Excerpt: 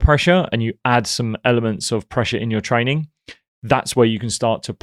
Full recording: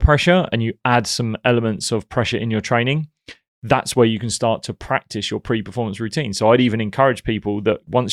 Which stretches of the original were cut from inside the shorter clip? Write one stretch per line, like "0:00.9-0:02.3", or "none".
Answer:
none